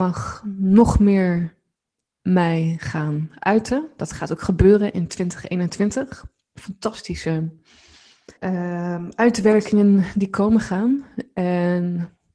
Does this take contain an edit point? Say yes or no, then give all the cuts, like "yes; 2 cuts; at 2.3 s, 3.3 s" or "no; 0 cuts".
yes; 1 cut; at 8.4 s